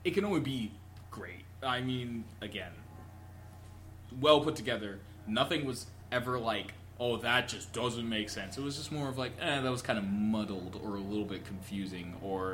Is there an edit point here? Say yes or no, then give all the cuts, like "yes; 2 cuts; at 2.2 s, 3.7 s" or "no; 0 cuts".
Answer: no; 0 cuts